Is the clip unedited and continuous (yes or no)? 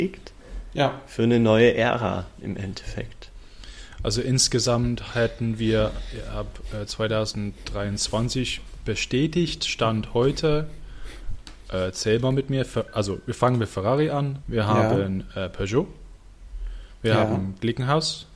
no